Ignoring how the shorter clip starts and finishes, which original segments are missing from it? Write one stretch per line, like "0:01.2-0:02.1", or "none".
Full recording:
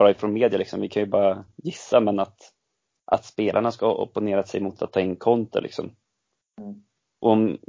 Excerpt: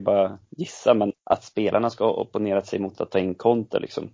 0:02.2-0:02.9

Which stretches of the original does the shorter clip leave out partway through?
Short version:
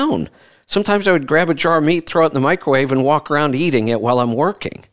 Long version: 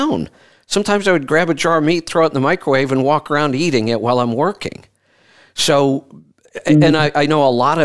none

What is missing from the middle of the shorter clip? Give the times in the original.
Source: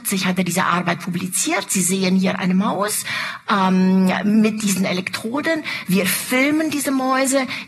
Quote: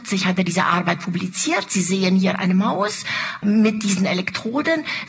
0:03.4-0:04.2

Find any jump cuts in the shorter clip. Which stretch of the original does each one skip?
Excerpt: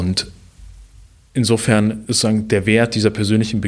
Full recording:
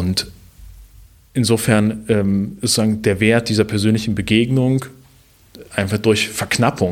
0:02.0-0:02.6

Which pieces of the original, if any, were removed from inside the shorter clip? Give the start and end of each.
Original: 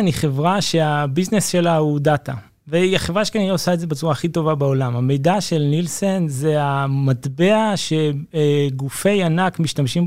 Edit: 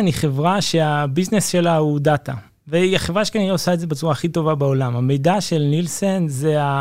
none

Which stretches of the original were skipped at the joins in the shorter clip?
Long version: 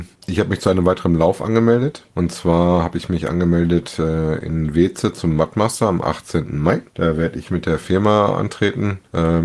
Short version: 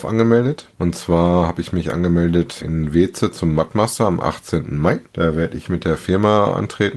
0:04.0-0:04.4

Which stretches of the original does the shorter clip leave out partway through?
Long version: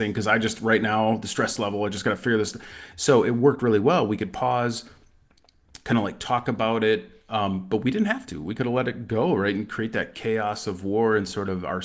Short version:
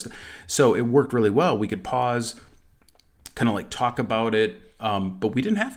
none

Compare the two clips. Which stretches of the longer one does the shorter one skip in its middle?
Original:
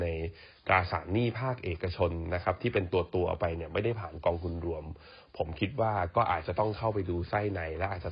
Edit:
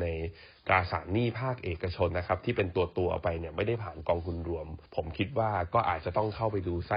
0:02.1-0:02.3
0:05.0-0:05.3

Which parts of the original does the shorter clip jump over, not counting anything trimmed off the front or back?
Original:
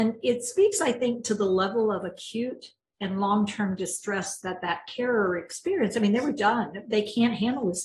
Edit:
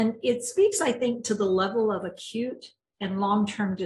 none

